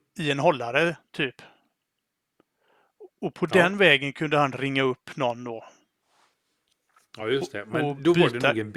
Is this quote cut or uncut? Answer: uncut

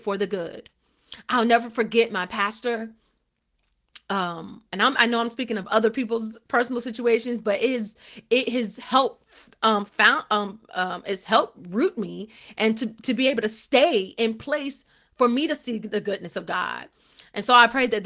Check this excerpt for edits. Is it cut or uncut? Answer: uncut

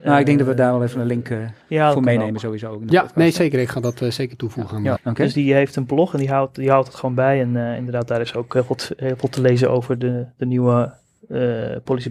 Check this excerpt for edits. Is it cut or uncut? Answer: cut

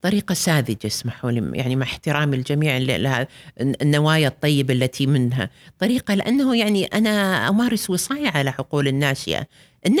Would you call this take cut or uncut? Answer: uncut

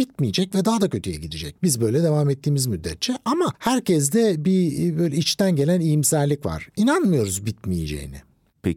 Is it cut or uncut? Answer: cut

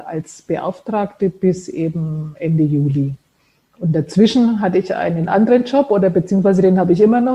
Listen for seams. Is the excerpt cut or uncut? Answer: uncut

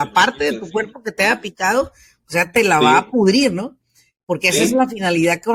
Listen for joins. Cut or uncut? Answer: uncut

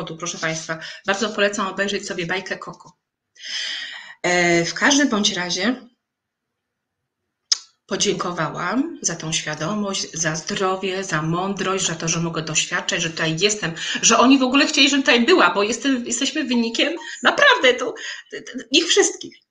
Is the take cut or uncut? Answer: uncut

